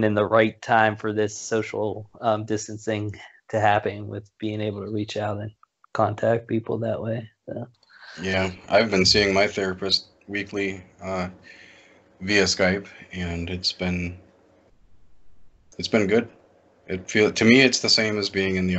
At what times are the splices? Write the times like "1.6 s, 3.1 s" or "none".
none